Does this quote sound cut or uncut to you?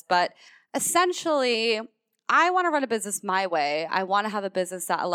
uncut